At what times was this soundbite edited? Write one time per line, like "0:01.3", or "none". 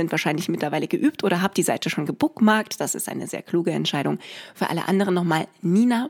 none